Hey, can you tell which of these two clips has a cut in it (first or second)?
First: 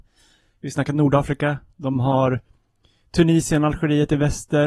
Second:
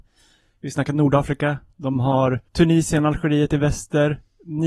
second